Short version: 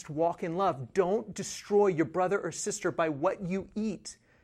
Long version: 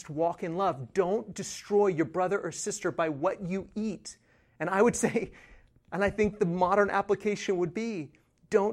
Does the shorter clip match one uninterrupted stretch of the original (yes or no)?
yes